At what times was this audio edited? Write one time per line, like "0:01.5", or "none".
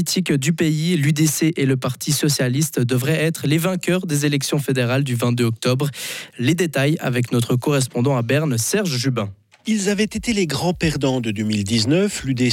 0:06.3